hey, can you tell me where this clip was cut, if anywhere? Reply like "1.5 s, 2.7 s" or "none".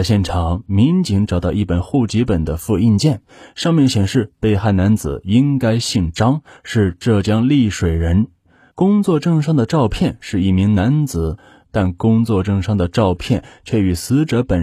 8.7 s, 11.6 s